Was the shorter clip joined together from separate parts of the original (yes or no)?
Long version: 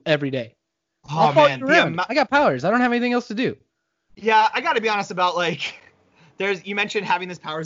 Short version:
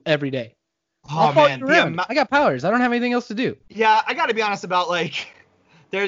yes